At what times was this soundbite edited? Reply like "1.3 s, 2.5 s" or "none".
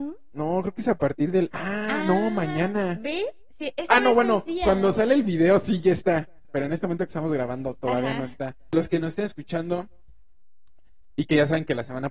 6.4 s, 8.7 s